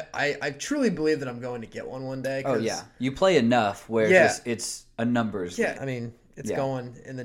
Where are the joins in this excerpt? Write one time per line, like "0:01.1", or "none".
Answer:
0:05.8